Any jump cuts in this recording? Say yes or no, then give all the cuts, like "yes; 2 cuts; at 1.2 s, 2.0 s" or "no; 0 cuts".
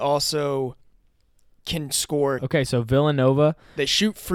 yes; 1 cut; at 2.4 s